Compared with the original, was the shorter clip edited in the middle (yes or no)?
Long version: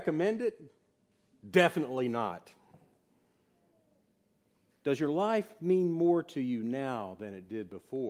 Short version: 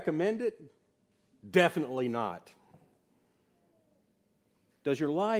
no